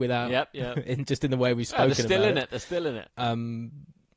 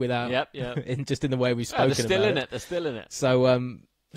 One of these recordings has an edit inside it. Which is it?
first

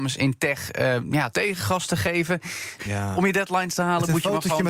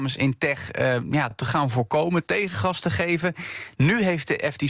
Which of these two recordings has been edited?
first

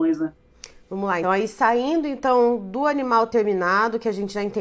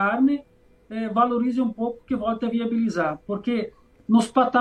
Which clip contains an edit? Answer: first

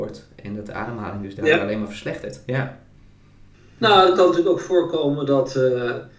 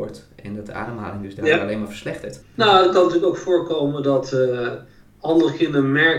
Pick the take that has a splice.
second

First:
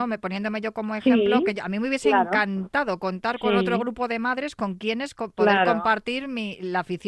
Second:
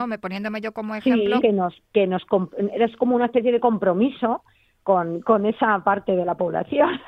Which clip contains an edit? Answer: second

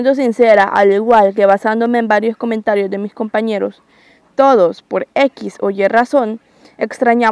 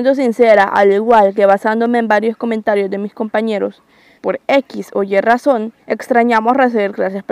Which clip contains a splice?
second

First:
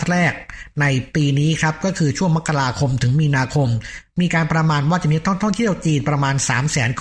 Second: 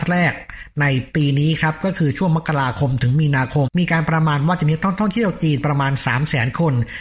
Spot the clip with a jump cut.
second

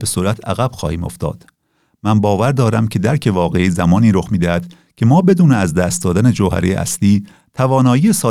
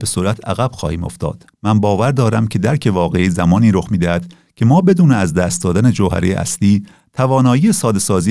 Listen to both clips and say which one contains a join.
second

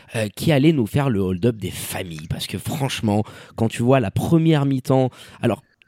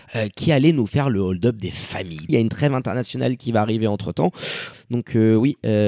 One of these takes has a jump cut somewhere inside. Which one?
second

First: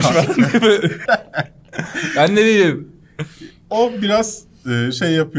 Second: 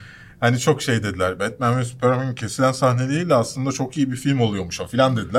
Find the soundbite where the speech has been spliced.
first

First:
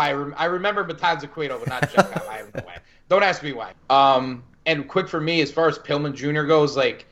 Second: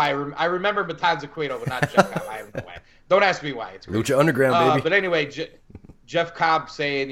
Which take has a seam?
first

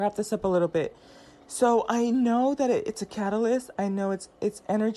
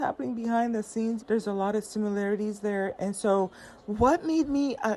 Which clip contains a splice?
second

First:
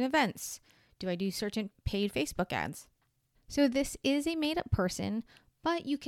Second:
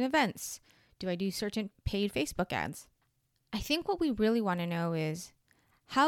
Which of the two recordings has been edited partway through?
first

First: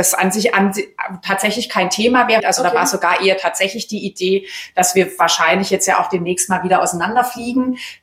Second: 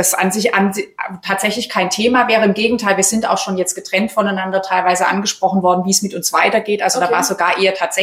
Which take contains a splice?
first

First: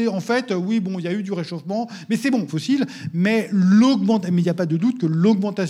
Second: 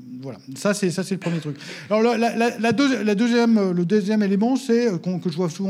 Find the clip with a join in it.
first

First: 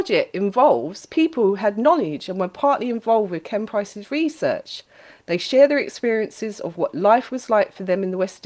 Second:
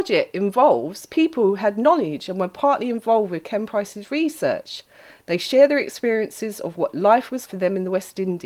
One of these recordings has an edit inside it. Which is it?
second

